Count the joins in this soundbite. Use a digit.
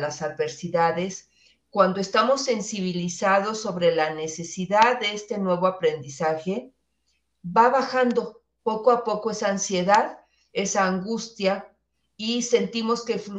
0